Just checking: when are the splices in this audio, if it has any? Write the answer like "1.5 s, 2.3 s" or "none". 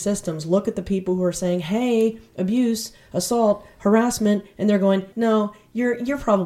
5.1 s